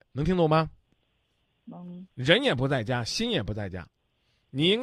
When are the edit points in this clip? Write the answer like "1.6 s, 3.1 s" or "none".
2.1 s

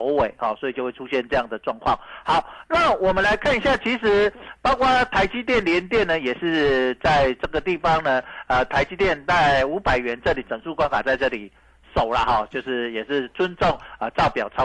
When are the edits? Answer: none

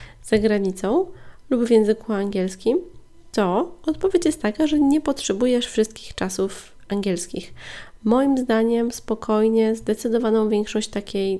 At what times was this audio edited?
none

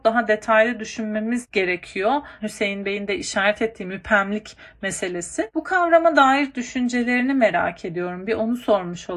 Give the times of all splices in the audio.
2.4 s

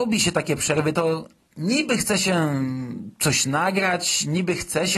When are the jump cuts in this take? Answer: none

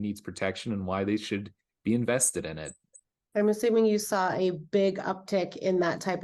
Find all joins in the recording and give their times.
none

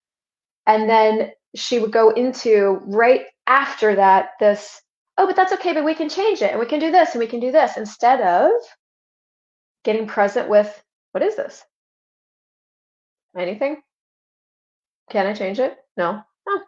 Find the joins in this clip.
13.3 s

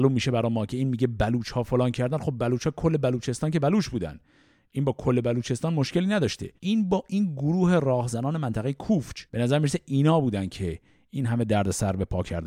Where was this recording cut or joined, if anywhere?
6.6 s, 9.3 s

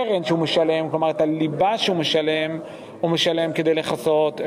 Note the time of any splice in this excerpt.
none

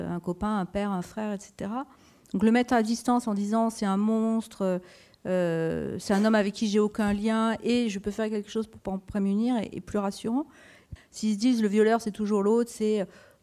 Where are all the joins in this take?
11.0 s

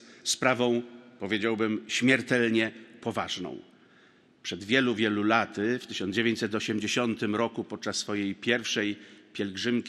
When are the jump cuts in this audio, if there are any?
none

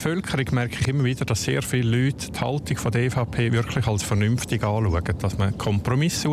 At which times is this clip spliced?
none

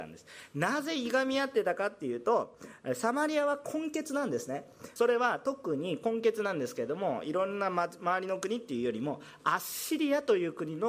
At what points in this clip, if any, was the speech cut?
5.0 s

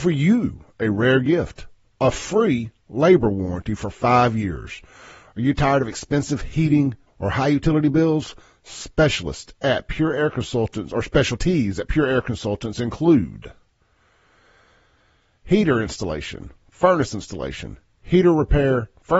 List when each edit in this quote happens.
7.1 s

